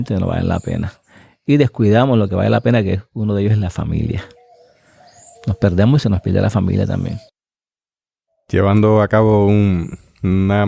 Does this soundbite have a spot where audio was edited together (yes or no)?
yes